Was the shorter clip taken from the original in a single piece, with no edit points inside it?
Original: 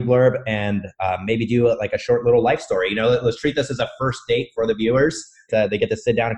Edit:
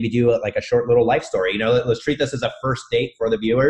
yes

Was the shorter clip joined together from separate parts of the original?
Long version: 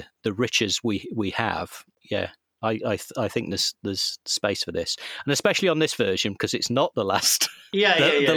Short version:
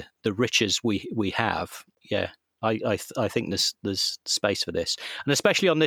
no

